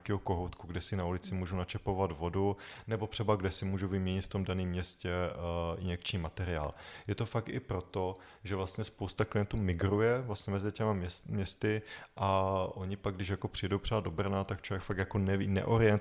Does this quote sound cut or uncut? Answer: uncut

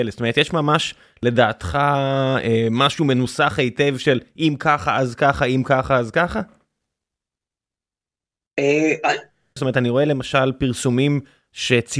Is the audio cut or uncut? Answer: cut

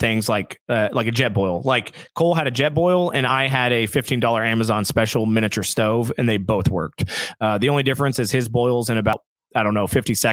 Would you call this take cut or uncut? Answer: uncut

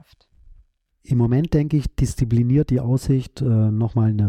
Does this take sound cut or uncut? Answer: uncut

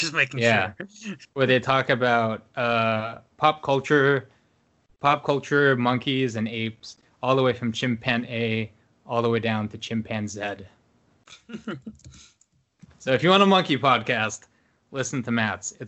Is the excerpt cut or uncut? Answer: uncut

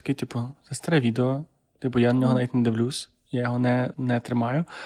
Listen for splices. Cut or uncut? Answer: cut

